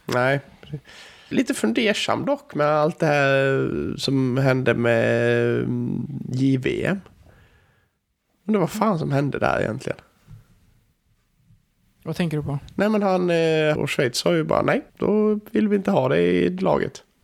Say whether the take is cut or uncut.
cut